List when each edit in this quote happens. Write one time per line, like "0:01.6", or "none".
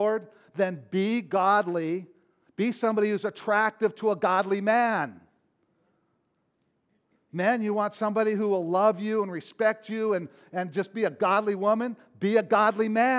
none